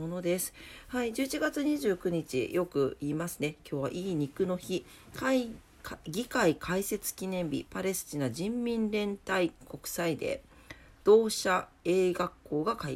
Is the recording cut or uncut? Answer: uncut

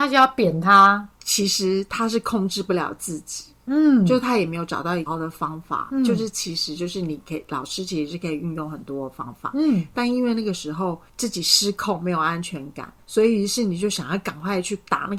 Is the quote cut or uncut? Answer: cut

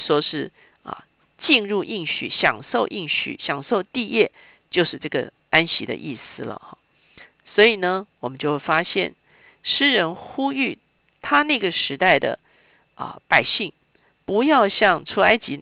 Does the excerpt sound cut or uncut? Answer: uncut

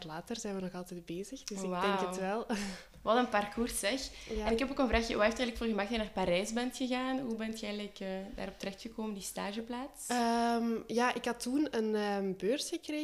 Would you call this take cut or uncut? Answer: uncut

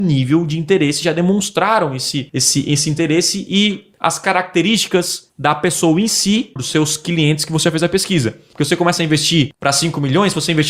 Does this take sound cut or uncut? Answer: cut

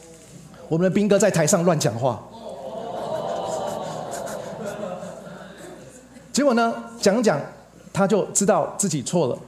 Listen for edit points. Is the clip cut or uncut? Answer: uncut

